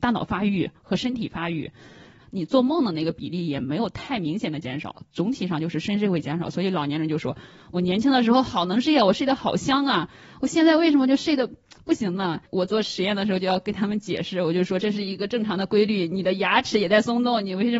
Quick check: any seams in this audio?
yes; 1 cut; at 2.2 s

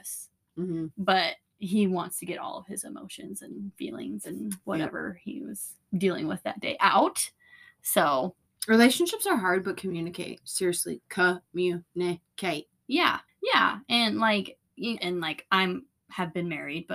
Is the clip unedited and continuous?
no; 2 cuts; at 13.3 s, 15.0 s

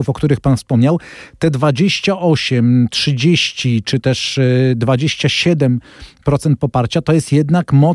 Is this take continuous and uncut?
yes; 0 cuts

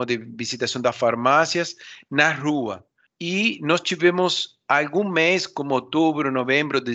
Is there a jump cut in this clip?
yes; 1 cut; at 3.1 s

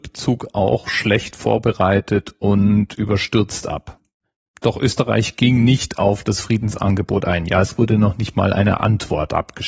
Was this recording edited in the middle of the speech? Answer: yes; 1 cut; at 4.4 s

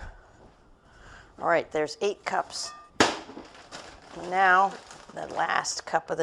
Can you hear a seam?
yes; 1 cut; at 2.9 s

